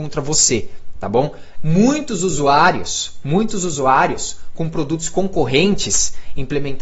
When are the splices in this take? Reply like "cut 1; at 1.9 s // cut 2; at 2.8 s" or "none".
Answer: cut 1; at 1.5 s